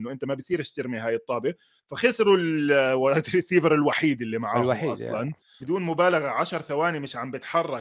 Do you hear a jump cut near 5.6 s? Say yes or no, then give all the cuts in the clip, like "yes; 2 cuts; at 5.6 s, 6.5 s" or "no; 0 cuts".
yes; 1 cut; at 5.6 s